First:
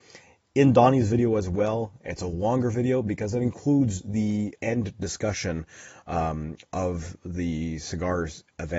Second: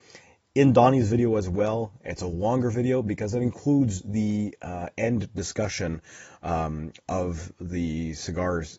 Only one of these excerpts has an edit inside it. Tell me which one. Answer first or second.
first